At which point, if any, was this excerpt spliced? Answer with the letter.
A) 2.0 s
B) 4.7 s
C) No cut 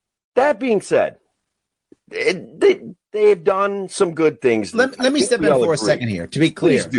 B